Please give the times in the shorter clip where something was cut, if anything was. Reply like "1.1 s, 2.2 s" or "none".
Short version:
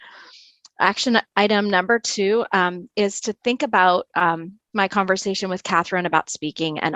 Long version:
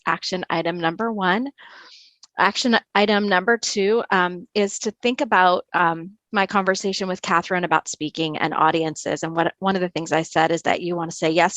none